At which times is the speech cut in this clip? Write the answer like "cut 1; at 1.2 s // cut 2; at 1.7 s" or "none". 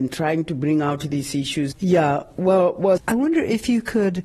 cut 1; at 1.7 s // cut 2; at 3.0 s

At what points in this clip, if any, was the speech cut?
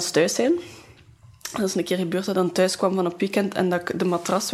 none

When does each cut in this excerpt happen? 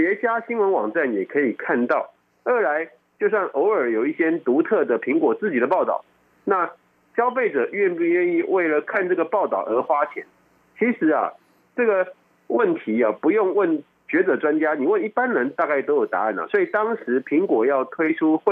none

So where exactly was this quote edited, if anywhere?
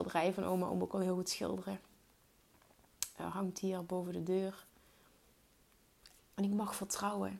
cut 1; at 6.2 s

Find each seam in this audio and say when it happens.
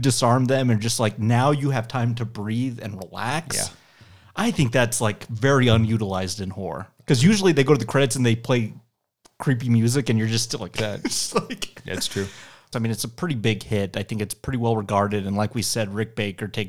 cut 1; at 10.8 s // cut 2; at 12.7 s

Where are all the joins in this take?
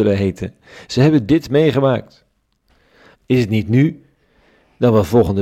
cut 1; at 3.1 s

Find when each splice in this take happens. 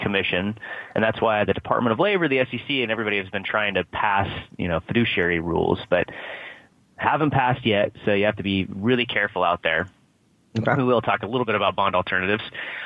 none

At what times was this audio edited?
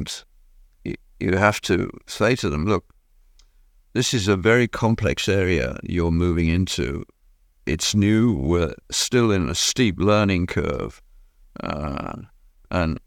none

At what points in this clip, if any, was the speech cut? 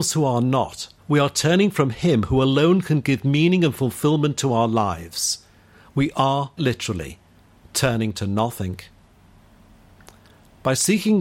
cut 1; at 1.0 s // cut 2; at 6.6 s

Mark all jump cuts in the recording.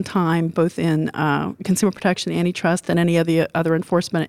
none

